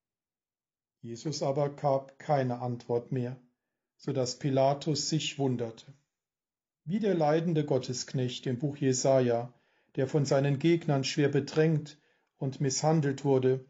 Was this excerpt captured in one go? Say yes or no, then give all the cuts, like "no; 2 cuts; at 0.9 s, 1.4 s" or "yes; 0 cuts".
no; 1 cut; at 6.7 s